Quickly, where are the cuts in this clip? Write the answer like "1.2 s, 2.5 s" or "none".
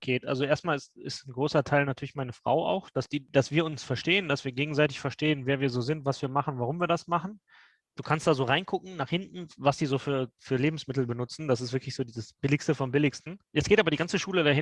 7.9 s